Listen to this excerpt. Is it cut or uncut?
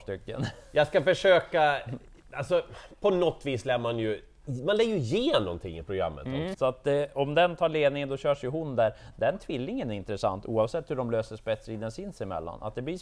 cut